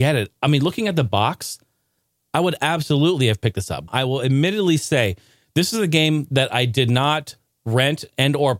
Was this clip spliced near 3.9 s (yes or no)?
yes